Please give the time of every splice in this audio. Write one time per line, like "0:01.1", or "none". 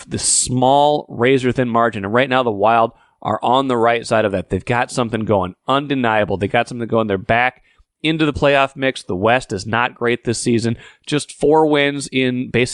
none